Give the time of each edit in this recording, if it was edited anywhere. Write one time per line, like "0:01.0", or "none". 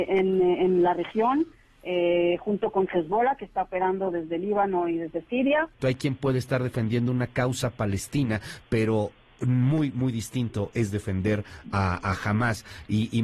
0:05.8